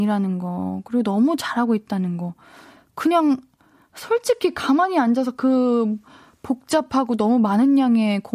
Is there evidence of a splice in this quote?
no; 0 cuts

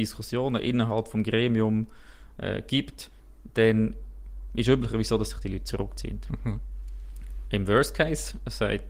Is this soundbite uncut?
yes; 0 cuts

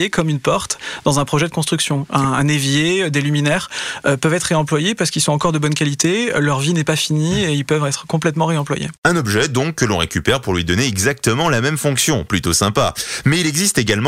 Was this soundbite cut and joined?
no; 0 cuts

